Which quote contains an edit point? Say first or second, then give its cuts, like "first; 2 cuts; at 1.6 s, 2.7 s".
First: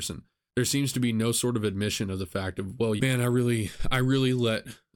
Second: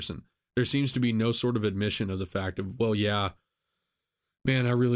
first; 1 cut; at 3.0 s